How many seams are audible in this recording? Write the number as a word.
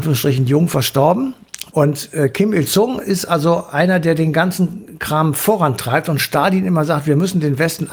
one